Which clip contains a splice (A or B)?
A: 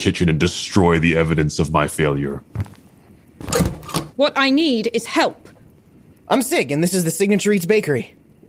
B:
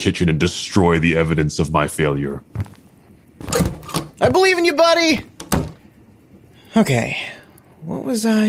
A